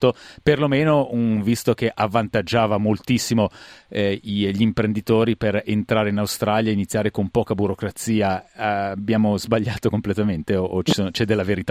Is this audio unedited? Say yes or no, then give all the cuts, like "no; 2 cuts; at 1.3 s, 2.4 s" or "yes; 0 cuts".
yes; 0 cuts